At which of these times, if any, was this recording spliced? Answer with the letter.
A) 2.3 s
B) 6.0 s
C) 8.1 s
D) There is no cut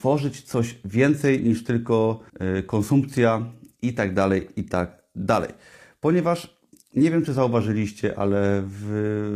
A